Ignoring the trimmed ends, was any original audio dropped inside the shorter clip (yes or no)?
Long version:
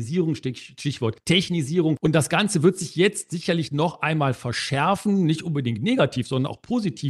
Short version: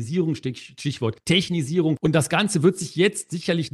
no